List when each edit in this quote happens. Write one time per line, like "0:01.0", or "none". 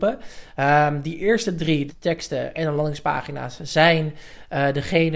0:01.9

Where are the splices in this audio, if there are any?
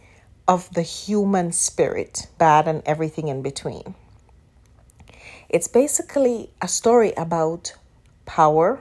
0:02.4

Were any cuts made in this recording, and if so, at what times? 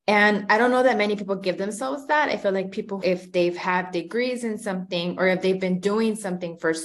0:03.0

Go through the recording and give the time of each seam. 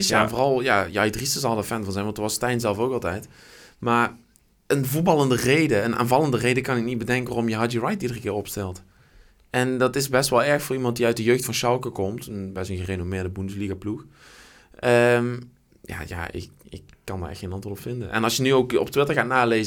0:16.1

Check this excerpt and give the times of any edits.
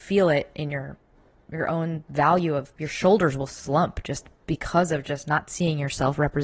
0:02.8

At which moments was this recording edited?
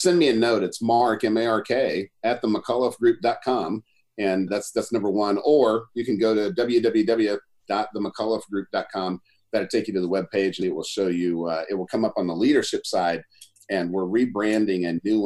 0:04.5
0:10.6

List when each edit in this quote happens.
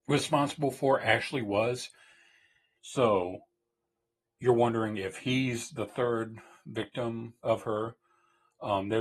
0:02.8
0:07.4

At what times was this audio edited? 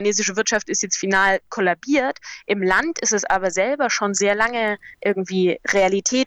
0:04.9

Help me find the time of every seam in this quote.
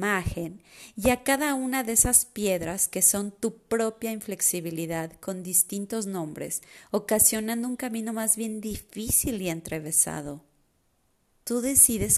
none

